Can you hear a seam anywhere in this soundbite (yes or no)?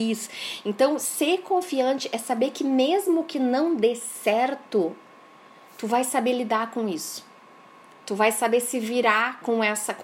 no